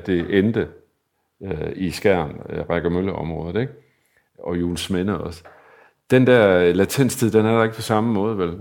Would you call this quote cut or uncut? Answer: uncut